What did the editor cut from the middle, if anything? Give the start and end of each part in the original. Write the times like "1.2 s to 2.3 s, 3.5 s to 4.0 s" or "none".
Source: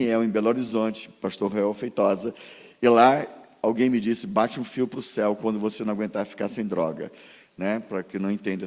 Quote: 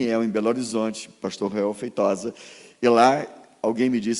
none